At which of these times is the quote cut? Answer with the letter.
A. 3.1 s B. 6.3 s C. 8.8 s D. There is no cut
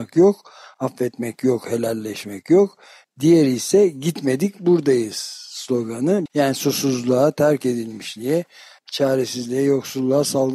B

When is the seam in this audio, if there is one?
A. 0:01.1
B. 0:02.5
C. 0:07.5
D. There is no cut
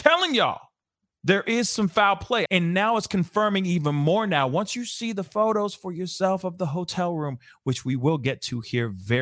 B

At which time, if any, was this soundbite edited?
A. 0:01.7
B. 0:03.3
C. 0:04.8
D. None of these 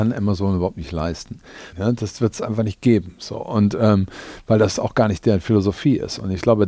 A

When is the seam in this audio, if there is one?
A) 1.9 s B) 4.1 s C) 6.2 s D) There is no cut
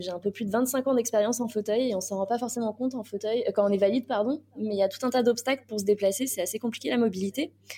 D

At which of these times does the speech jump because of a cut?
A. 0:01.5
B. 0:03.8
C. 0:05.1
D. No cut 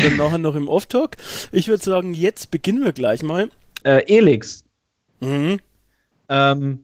B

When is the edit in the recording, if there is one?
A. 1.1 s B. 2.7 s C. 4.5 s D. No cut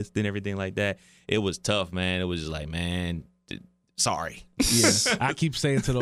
D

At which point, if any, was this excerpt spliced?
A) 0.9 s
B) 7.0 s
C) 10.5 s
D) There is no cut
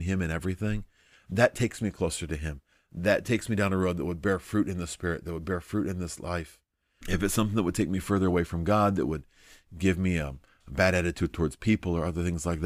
B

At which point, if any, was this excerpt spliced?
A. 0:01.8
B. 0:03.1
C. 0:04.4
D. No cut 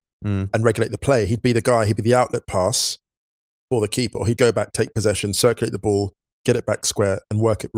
C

